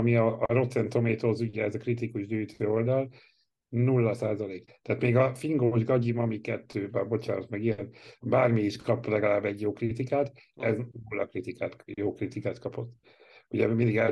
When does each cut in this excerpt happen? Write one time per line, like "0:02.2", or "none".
0:04.7